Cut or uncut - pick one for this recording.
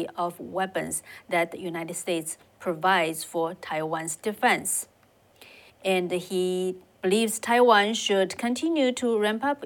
cut